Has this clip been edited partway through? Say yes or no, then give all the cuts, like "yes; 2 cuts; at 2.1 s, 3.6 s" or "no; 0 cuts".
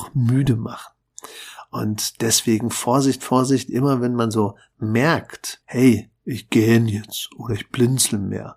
yes; 1 cut; at 5.6 s